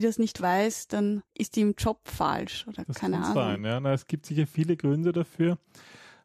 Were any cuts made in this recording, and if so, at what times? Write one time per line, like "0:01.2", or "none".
0:01.3